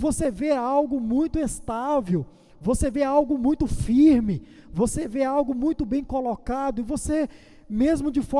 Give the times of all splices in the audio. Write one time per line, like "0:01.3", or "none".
none